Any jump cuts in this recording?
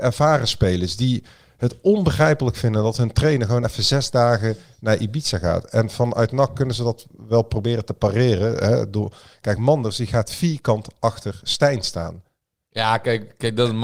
no; 0 cuts

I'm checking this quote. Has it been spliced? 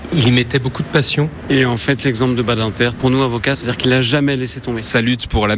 yes; 2 cuts; at 1.5 s, 3.5 s

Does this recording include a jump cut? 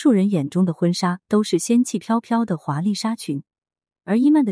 no; 0 cuts

